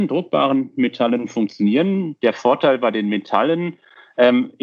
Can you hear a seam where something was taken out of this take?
no; 0 cuts

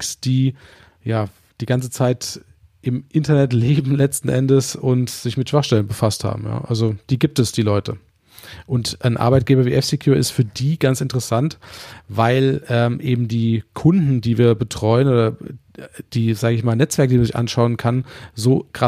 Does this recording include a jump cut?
no; 0 cuts

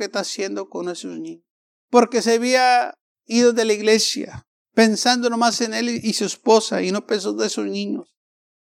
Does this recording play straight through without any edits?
no; 1 cut; at 1.9 s

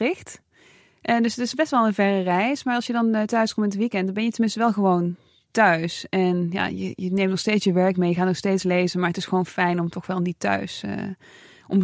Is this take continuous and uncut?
yes; 0 cuts

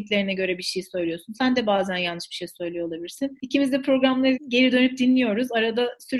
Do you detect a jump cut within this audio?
no; 0 cuts

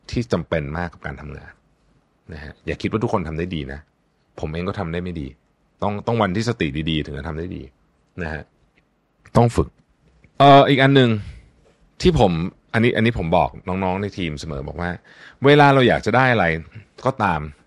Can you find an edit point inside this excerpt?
no; 0 cuts

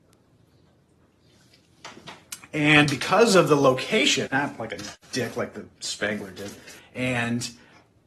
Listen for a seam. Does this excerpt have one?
yes; 2 cuts; at 4.3 s, 6.8 s

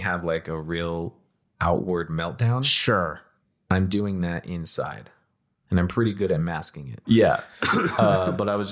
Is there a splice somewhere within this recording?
yes; 1 cut; at 7.0 s

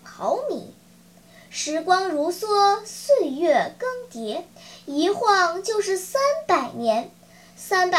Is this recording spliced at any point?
no; 0 cuts

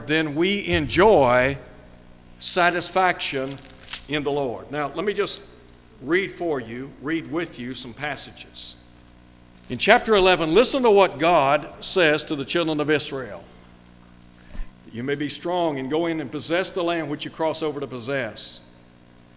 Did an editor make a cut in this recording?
yes; 2 cuts; at 9.6 s, 14.7 s

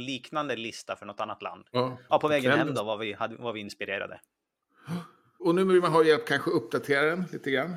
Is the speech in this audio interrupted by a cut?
yes; 1 cut; at 2.1 s

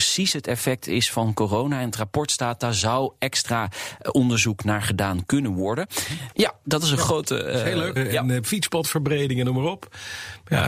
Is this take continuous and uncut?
no; 2 cuts; at 6.3 s, 8.0 s

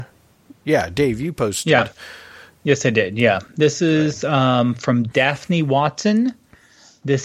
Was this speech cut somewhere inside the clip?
no; 0 cuts

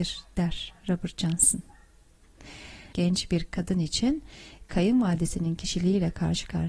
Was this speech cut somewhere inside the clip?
yes; 1 cut; at 2.9 s

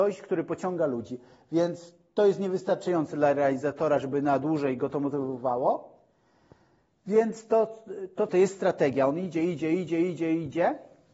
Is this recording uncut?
no; 1 cut; at 8.3 s

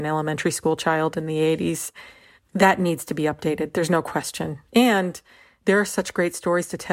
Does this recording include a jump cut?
no; 0 cuts

